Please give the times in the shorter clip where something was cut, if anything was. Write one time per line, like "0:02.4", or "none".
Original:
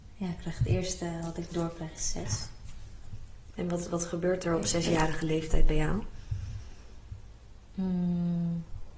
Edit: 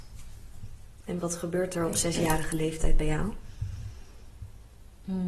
0:01.2

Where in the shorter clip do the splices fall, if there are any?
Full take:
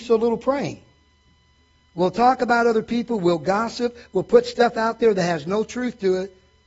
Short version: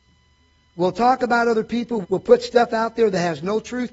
0:02.0

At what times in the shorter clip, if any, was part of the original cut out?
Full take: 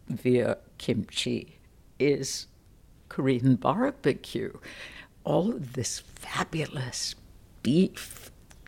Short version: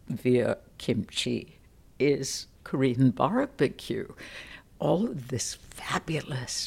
0:02.5

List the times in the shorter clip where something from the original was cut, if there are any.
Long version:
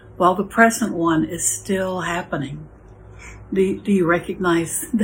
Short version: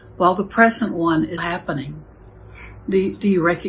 0:01.4

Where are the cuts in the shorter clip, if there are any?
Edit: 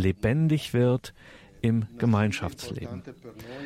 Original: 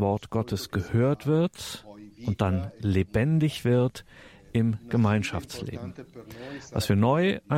none

